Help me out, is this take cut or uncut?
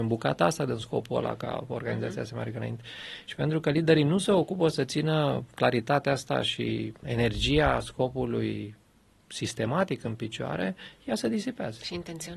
cut